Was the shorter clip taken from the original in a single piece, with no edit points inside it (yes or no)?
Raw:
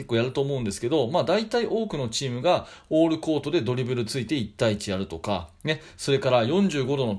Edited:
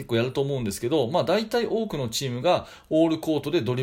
yes